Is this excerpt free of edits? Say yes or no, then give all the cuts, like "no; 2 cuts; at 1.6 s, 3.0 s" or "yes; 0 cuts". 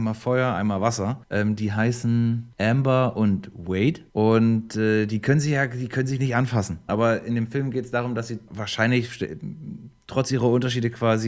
no; 2 cuts; at 6.9 s, 10.0 s